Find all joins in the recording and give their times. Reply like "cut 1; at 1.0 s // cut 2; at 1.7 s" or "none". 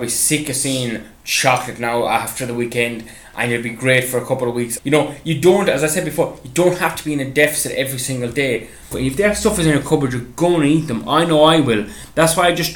cut 1; at 4.8 s // cut 2; at 8.9 s